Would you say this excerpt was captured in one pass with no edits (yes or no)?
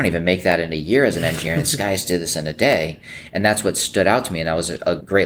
yes